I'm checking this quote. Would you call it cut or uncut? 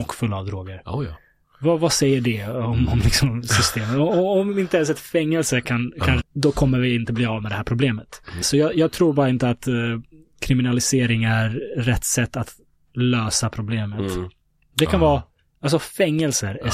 cut